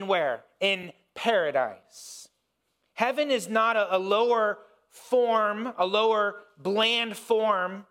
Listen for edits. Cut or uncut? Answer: uncut